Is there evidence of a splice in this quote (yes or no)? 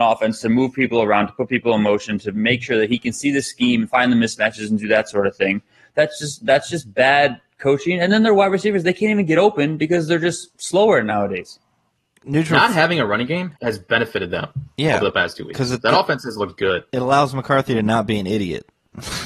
yes